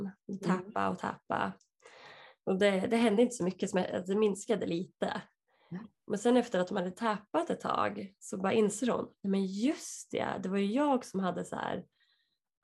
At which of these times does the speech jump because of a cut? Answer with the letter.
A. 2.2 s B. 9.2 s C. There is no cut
C